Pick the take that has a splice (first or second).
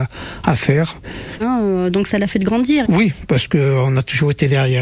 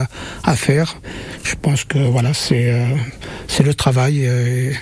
first